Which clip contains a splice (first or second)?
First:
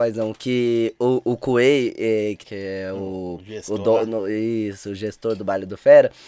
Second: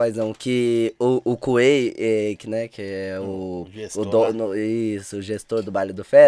first